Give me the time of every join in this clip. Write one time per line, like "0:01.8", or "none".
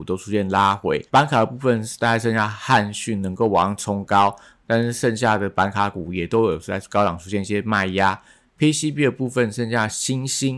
0:01.1